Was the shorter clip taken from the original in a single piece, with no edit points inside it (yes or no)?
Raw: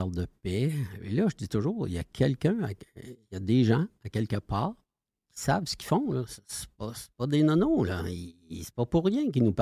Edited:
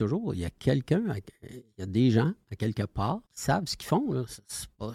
no